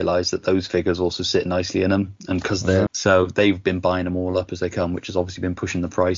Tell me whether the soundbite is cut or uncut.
cut